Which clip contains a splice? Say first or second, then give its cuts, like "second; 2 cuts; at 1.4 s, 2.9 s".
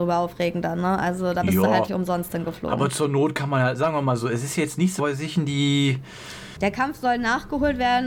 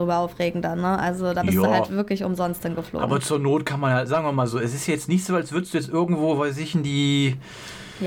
first; 3 cuts; at 1.9 s, 5.0 s, 6.6 s